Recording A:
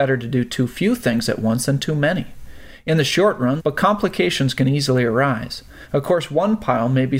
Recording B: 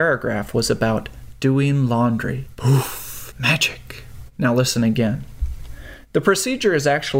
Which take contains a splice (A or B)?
A